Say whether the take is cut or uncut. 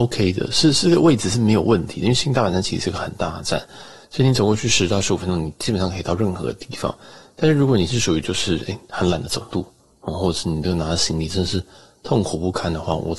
uncut